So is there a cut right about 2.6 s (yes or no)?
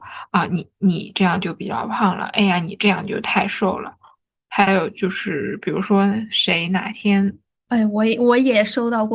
no